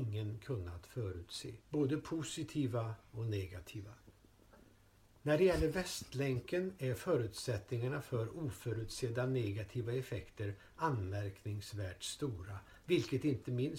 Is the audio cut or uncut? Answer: cut